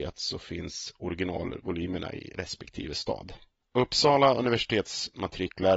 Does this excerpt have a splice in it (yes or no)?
no